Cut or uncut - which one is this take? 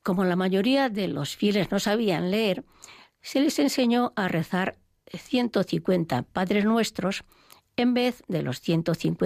uncut